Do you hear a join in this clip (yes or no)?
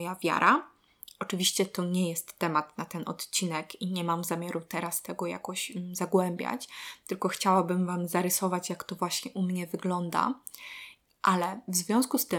no